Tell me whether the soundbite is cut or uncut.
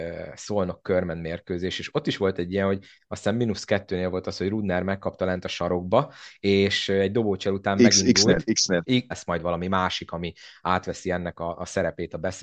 cut